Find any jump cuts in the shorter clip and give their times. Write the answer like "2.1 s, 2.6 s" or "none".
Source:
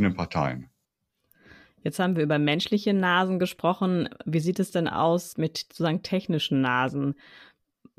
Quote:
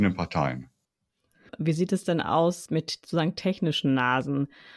1.5 s